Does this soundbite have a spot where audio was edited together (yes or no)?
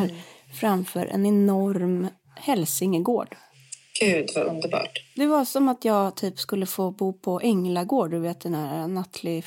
no